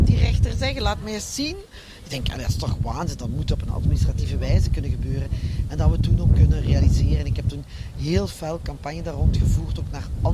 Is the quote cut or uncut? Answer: uncut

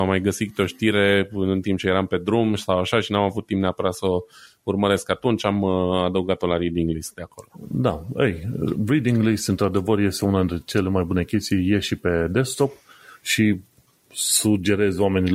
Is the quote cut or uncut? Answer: uncut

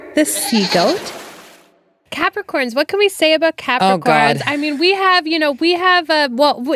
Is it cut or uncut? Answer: uncut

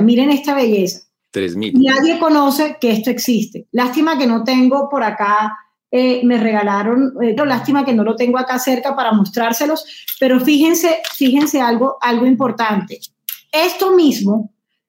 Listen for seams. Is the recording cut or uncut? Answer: cut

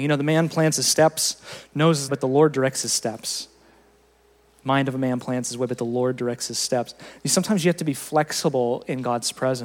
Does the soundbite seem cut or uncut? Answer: cut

